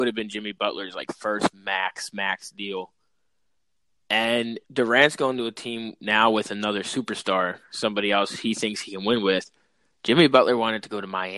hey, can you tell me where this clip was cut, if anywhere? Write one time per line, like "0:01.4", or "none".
0:04.6